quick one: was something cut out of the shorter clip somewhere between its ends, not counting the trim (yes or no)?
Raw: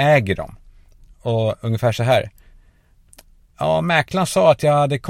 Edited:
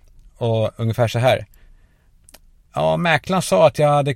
no